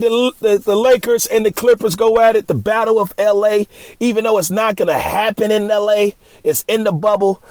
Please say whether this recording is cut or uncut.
uncut